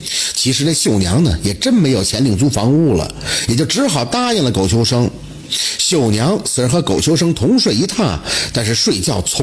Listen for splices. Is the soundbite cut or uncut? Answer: uncut